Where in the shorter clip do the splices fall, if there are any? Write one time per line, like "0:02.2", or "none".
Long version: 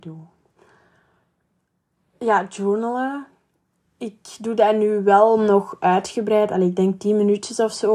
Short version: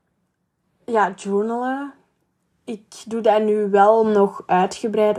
none